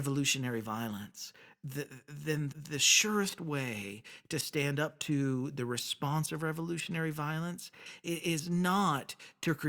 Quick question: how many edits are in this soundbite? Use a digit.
1